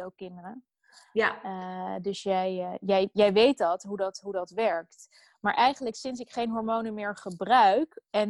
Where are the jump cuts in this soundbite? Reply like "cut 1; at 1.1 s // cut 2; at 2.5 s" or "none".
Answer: none